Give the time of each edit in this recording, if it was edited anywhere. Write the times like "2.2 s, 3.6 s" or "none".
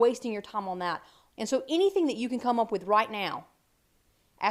1.3 s